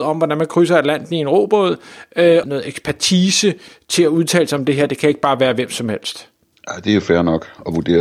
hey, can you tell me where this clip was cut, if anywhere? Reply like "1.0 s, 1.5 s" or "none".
2.4 s

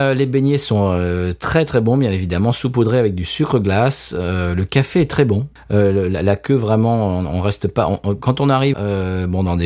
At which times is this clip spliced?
5.6 s, 8.7 s

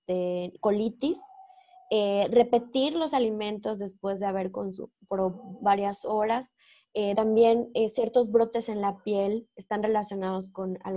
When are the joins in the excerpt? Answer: 4.9 s, 7.1 s

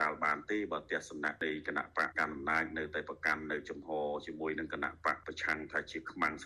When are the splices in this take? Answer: 2.1 s

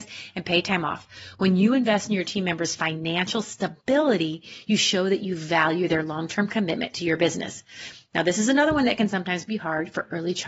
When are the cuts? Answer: none

